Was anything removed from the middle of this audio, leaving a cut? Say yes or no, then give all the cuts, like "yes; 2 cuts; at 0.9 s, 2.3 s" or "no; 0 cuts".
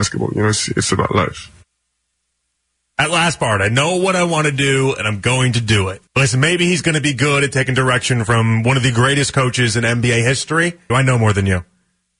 yes; 2 cuts; at 6.1 s, 10.9 s